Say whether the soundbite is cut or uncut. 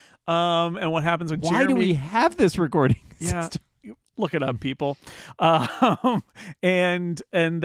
cut